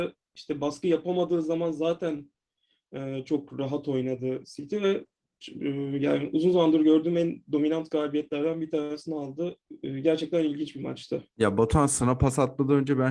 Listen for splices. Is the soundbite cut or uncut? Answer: cut